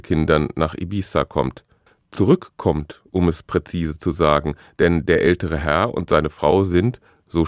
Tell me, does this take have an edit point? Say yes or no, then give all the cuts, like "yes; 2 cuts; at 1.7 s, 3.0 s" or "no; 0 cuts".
no; 0 cuts